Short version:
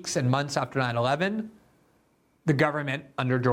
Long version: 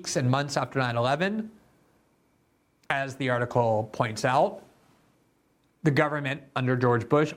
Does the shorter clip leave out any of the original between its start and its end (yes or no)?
yes